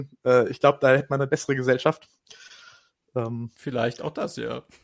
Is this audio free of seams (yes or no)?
no